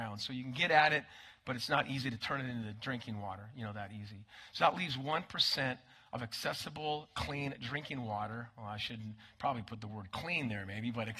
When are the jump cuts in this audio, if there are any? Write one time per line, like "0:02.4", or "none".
none